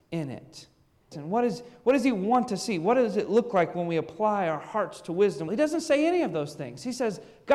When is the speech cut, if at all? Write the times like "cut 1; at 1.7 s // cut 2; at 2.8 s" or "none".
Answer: cut 1; at 1.1 s // cut 2; at 5.5 s